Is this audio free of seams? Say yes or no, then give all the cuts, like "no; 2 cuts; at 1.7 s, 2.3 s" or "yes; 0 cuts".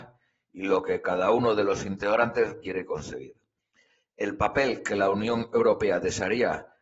no; 1 cut; at 2.6 s